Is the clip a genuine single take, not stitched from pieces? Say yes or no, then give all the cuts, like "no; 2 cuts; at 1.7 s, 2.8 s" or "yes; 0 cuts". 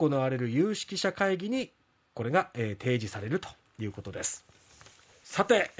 yes; 0 cuts